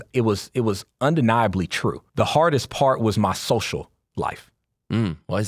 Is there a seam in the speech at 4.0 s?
no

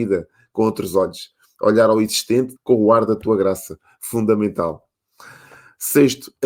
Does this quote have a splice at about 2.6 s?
yes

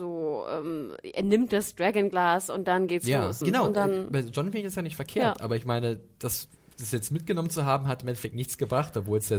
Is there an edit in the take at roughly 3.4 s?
yes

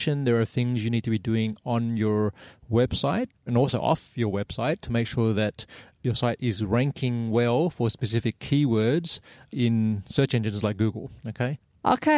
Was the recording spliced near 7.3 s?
no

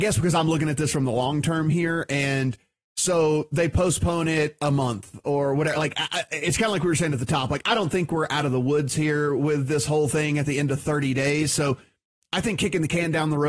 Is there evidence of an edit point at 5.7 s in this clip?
no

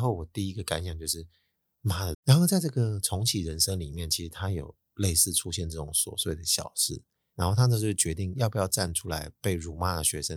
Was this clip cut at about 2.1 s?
yes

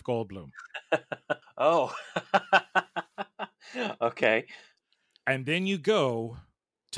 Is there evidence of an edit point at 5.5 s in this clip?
no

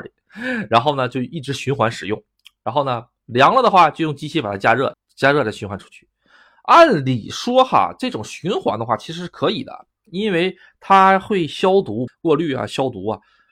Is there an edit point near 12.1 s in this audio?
yes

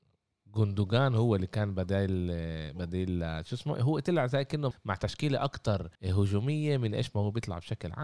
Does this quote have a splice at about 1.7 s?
no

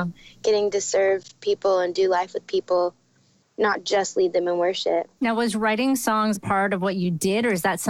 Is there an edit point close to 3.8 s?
no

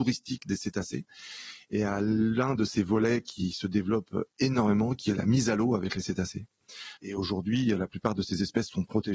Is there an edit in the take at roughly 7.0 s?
yes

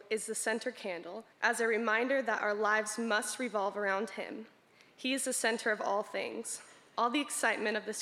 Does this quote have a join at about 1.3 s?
yes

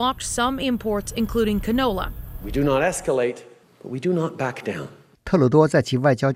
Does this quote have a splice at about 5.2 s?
yes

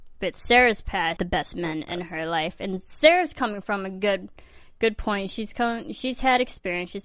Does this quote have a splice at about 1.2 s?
yes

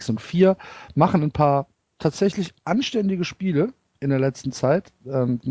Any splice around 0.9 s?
no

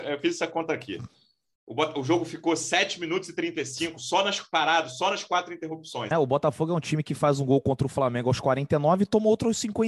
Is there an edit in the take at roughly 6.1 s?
yes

